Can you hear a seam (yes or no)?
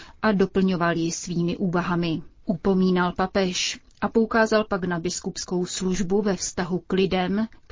yes